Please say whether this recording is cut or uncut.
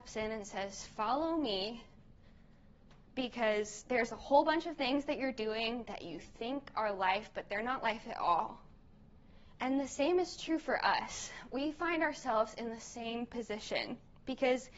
cut